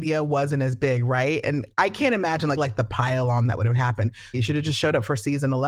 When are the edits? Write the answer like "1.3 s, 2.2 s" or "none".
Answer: 2.6 s, 4.3 s

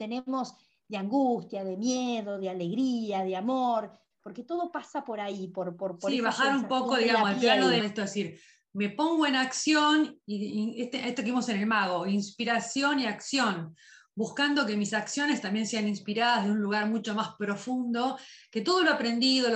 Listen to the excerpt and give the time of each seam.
7.8 s

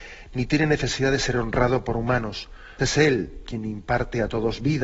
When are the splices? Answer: 2.8 s

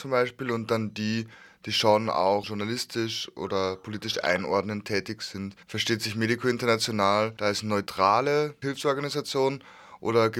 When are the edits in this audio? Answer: 5.6 s, 8.6 s

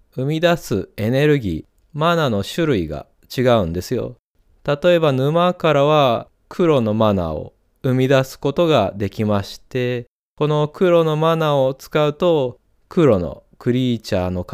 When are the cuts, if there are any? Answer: 12.8 s

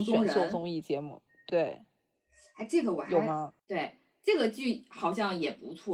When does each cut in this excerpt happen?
1.5 s, 3.6 s

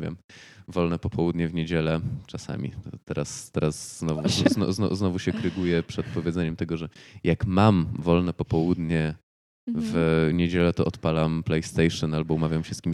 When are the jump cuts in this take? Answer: 4.2 s

